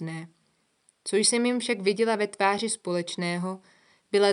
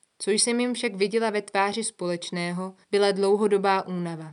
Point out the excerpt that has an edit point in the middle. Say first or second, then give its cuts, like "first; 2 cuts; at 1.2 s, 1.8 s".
second; 1 cut; at 2.8 s